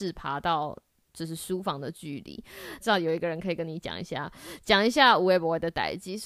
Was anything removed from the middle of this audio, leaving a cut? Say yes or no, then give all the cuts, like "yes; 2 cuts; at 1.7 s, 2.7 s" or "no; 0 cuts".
yes; 1 cut; at 2.8 s